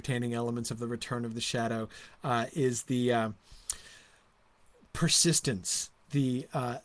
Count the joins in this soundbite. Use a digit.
0